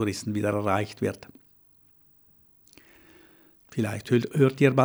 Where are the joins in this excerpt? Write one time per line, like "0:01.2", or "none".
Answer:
0:03.7